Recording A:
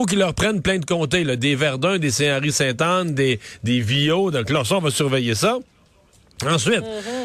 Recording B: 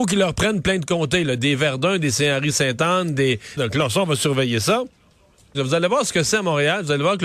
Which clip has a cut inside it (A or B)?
B